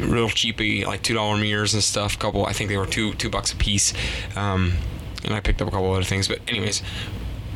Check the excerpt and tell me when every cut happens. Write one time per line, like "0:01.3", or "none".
none